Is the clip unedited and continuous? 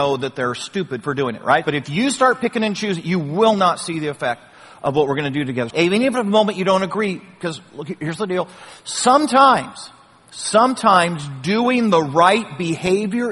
no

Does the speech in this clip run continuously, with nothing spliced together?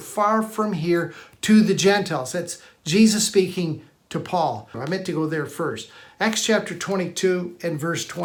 no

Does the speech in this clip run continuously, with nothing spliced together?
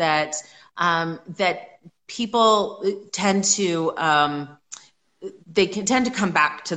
no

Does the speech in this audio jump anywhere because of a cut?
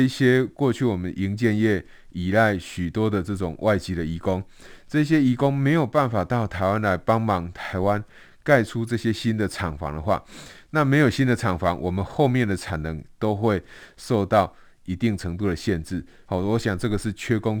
yes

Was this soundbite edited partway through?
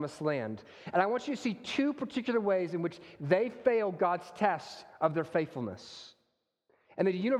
no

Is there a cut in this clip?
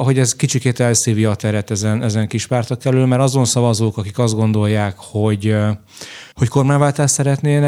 yes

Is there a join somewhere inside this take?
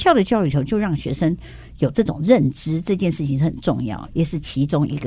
yes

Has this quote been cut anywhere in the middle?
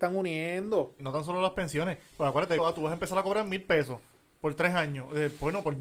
yes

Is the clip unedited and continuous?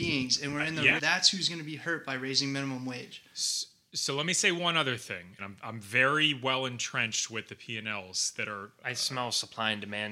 no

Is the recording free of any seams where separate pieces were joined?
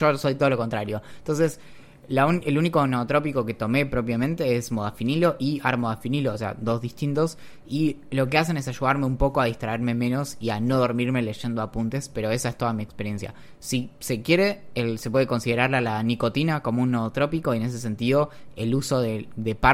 yes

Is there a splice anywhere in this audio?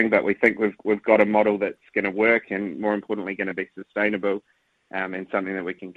no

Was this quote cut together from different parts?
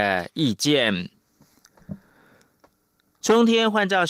no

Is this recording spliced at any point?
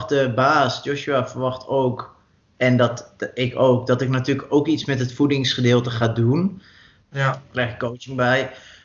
yes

